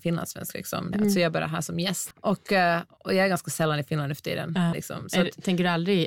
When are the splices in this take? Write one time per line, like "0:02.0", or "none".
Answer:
0:00.9
0:02.1
0:04.7